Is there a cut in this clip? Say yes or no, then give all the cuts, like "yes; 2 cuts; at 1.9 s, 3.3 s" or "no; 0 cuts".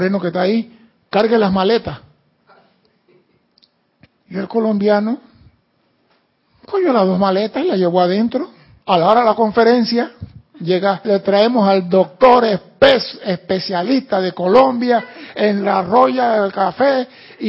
yes; 2 cuts; at 8.8 s, 11.0 s